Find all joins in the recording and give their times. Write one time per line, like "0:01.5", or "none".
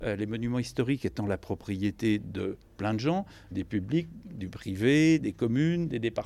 0:03.5
0:05.2